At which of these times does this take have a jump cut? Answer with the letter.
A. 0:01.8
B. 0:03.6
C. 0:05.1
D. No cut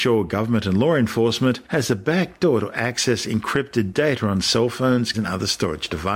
C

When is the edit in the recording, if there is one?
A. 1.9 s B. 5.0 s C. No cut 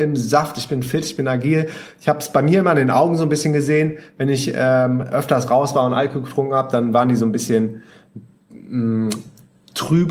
C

